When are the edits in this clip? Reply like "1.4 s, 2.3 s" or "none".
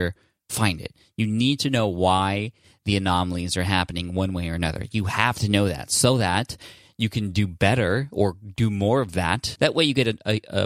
9.6 s